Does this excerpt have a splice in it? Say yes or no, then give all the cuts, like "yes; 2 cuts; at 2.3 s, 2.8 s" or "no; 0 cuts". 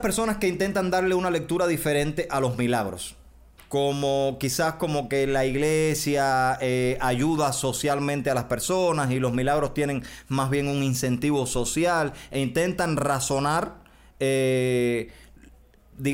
no; 0 cuts